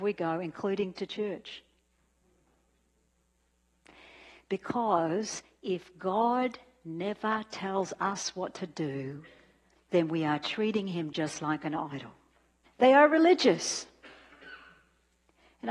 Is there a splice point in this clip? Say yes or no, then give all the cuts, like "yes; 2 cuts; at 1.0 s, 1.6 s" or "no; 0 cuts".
yes; 1 cut; at 12.6 s